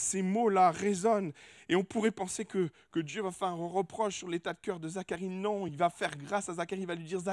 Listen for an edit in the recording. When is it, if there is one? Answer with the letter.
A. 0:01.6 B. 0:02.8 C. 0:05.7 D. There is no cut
D